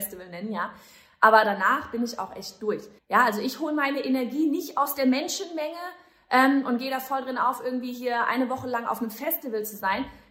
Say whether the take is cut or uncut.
cut